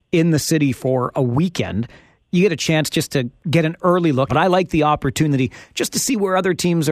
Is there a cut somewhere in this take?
yes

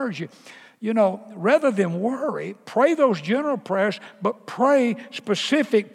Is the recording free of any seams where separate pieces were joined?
yes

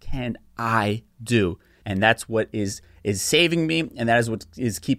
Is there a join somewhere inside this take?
no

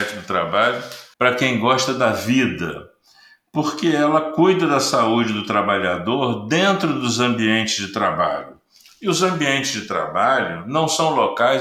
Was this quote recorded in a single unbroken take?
no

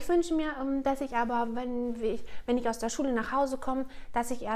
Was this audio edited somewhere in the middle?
no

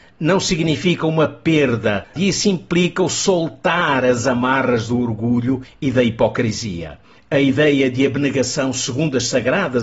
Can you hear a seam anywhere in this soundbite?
yes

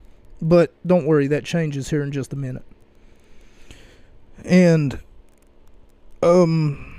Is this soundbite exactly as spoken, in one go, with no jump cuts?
yes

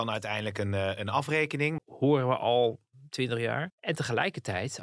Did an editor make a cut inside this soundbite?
yes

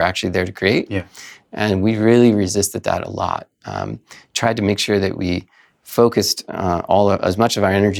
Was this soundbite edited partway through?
no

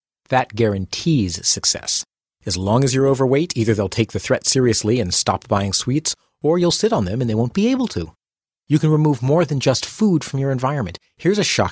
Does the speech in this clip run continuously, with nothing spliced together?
yes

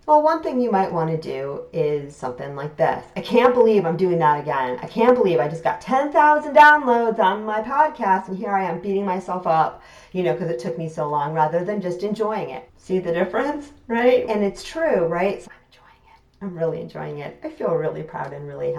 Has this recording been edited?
yes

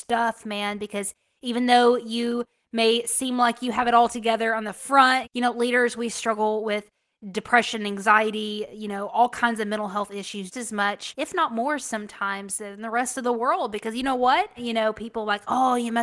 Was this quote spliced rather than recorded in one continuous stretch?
yes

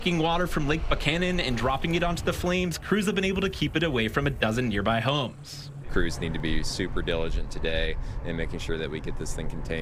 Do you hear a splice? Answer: yes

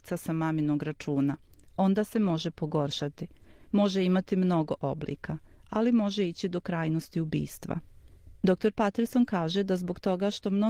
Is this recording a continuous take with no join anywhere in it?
yes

